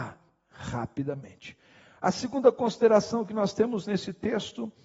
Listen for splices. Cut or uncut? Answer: uncut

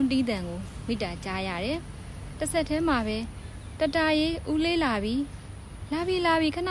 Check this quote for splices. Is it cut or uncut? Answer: uncut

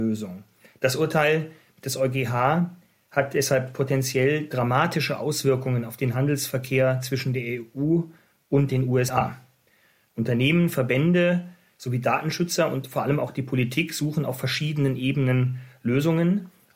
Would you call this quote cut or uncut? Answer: uncut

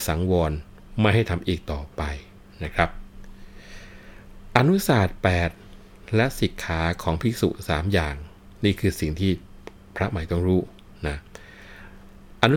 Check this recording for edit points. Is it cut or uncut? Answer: cut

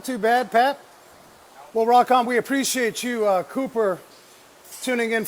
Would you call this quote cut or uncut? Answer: cut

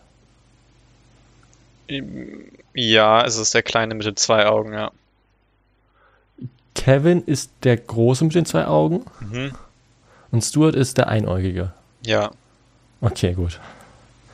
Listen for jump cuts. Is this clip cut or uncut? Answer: uncut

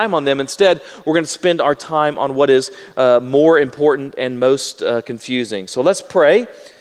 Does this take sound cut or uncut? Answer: uncut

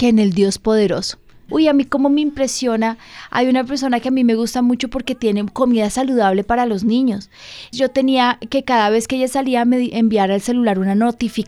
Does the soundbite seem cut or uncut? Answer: cut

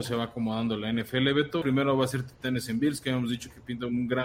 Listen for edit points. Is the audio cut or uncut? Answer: cut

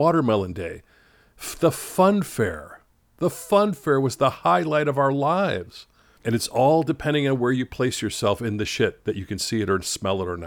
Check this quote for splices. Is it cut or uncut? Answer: cut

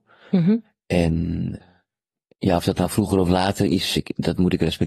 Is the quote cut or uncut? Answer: cut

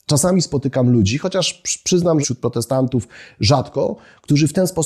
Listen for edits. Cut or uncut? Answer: cut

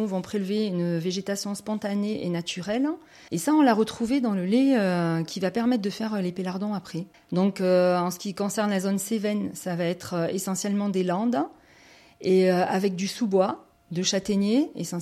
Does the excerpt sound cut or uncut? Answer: cut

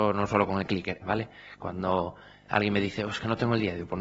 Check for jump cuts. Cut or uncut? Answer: cut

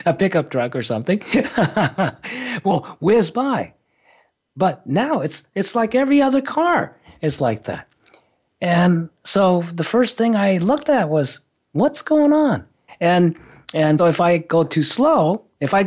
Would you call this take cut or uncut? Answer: cut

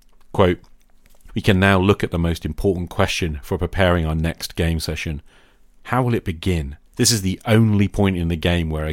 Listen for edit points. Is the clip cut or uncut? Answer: cut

